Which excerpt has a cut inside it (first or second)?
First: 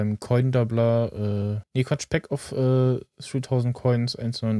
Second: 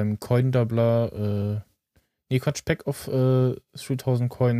first